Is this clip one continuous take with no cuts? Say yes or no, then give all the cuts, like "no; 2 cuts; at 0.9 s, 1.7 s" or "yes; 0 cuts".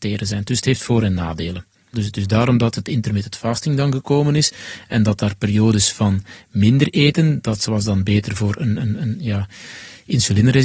no; 1 cut; at 1.9 s